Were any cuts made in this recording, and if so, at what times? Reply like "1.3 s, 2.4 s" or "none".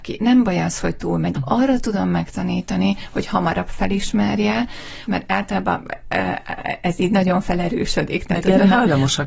1.3 s, 5.1 s